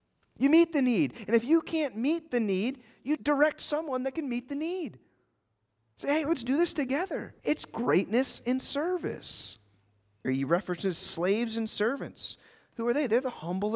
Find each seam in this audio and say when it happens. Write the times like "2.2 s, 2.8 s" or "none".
3.2 s, 7.4 s, 10.2 s